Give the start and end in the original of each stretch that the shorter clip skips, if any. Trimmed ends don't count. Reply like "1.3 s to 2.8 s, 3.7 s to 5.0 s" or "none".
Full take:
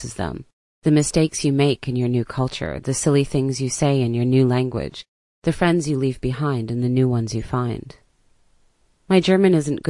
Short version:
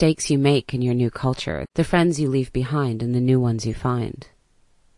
2.8 s to 5.3 s